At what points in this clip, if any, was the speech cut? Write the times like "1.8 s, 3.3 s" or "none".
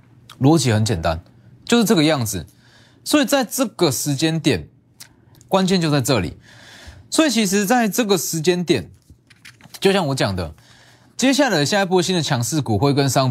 5.4 s